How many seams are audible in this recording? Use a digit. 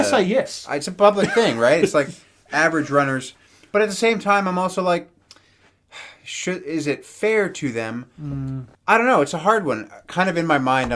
1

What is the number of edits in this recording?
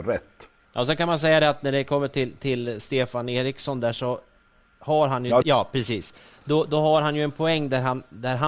1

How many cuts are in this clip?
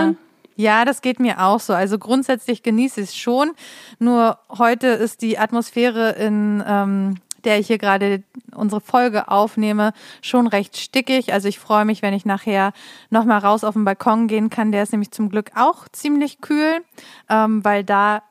0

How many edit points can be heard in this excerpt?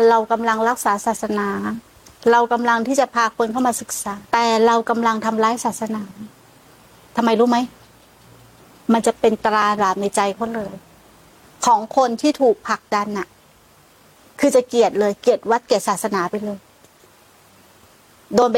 1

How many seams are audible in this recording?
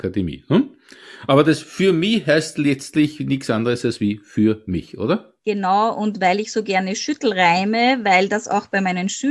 1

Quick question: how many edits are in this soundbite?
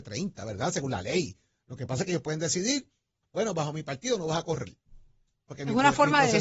1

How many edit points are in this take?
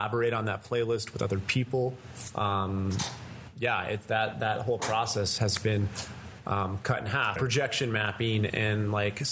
2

